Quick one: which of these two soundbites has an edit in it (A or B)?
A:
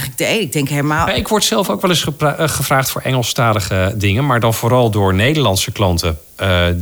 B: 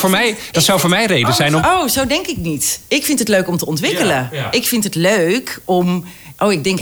B